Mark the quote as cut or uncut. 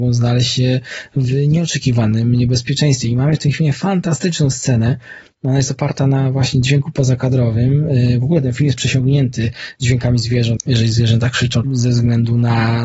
cut